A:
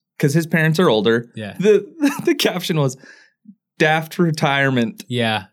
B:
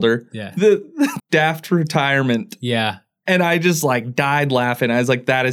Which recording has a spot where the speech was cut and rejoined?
B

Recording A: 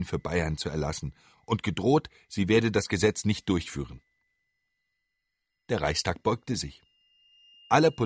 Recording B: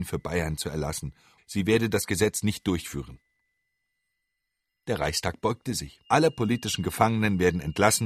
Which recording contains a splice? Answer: B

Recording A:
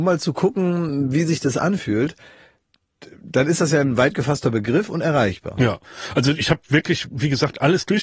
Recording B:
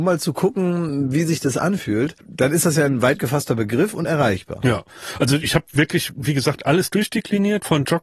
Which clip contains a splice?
B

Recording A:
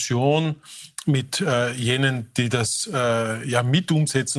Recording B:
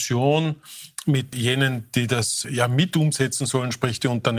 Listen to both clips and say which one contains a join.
B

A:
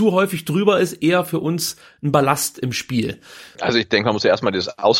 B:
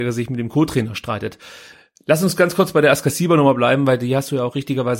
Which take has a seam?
A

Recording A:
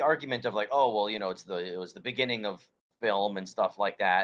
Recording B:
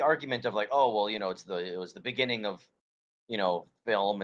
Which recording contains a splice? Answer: A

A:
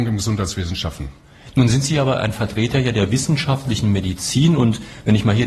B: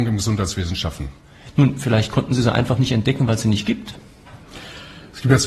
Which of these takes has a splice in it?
B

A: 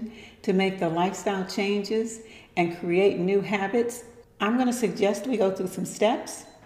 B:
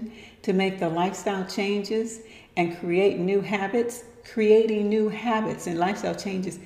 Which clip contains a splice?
A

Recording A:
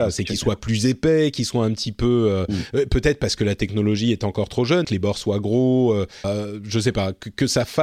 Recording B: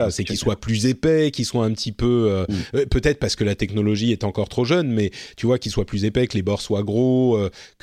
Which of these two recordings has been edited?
A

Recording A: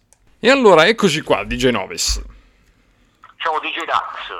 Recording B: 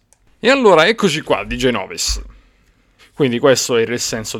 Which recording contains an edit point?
B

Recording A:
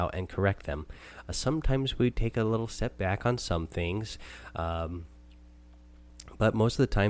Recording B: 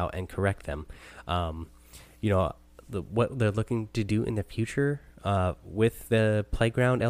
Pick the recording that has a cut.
A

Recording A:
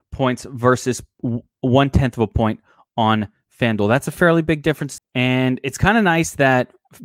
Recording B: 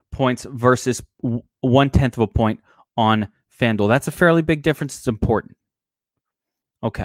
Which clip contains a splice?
A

